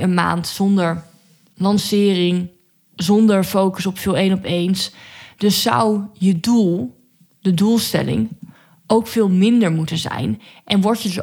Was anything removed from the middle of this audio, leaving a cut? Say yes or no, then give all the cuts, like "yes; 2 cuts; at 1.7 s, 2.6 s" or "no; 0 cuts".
no; 0 cuts